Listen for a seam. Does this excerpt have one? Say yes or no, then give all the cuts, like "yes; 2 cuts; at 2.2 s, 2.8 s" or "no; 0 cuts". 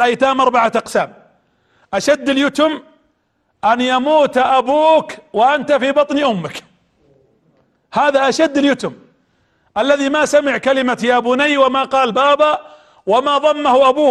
no; 0 cuts